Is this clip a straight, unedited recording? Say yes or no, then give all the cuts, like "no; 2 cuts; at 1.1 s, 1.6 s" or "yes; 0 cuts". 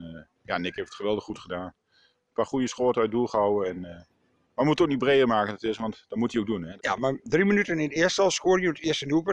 no; 1 cut; at 6.8 s